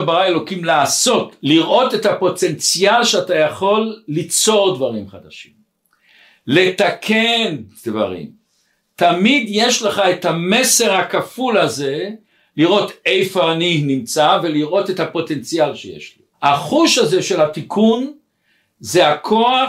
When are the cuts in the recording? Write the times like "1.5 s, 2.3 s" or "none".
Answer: 1.4 s, 16.3 s